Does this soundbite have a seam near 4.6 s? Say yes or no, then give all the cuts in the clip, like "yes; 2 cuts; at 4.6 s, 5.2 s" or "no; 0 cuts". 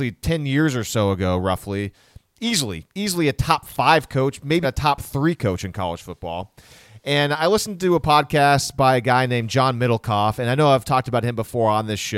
yes; 1 cut; at 4.6 s